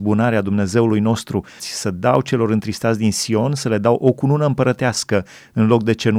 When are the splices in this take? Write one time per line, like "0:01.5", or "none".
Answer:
0:01.6